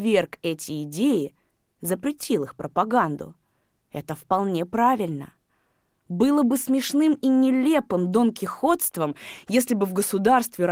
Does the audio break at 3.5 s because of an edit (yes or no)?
no